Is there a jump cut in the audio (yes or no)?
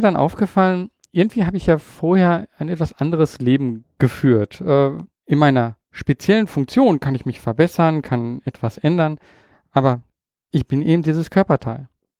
yes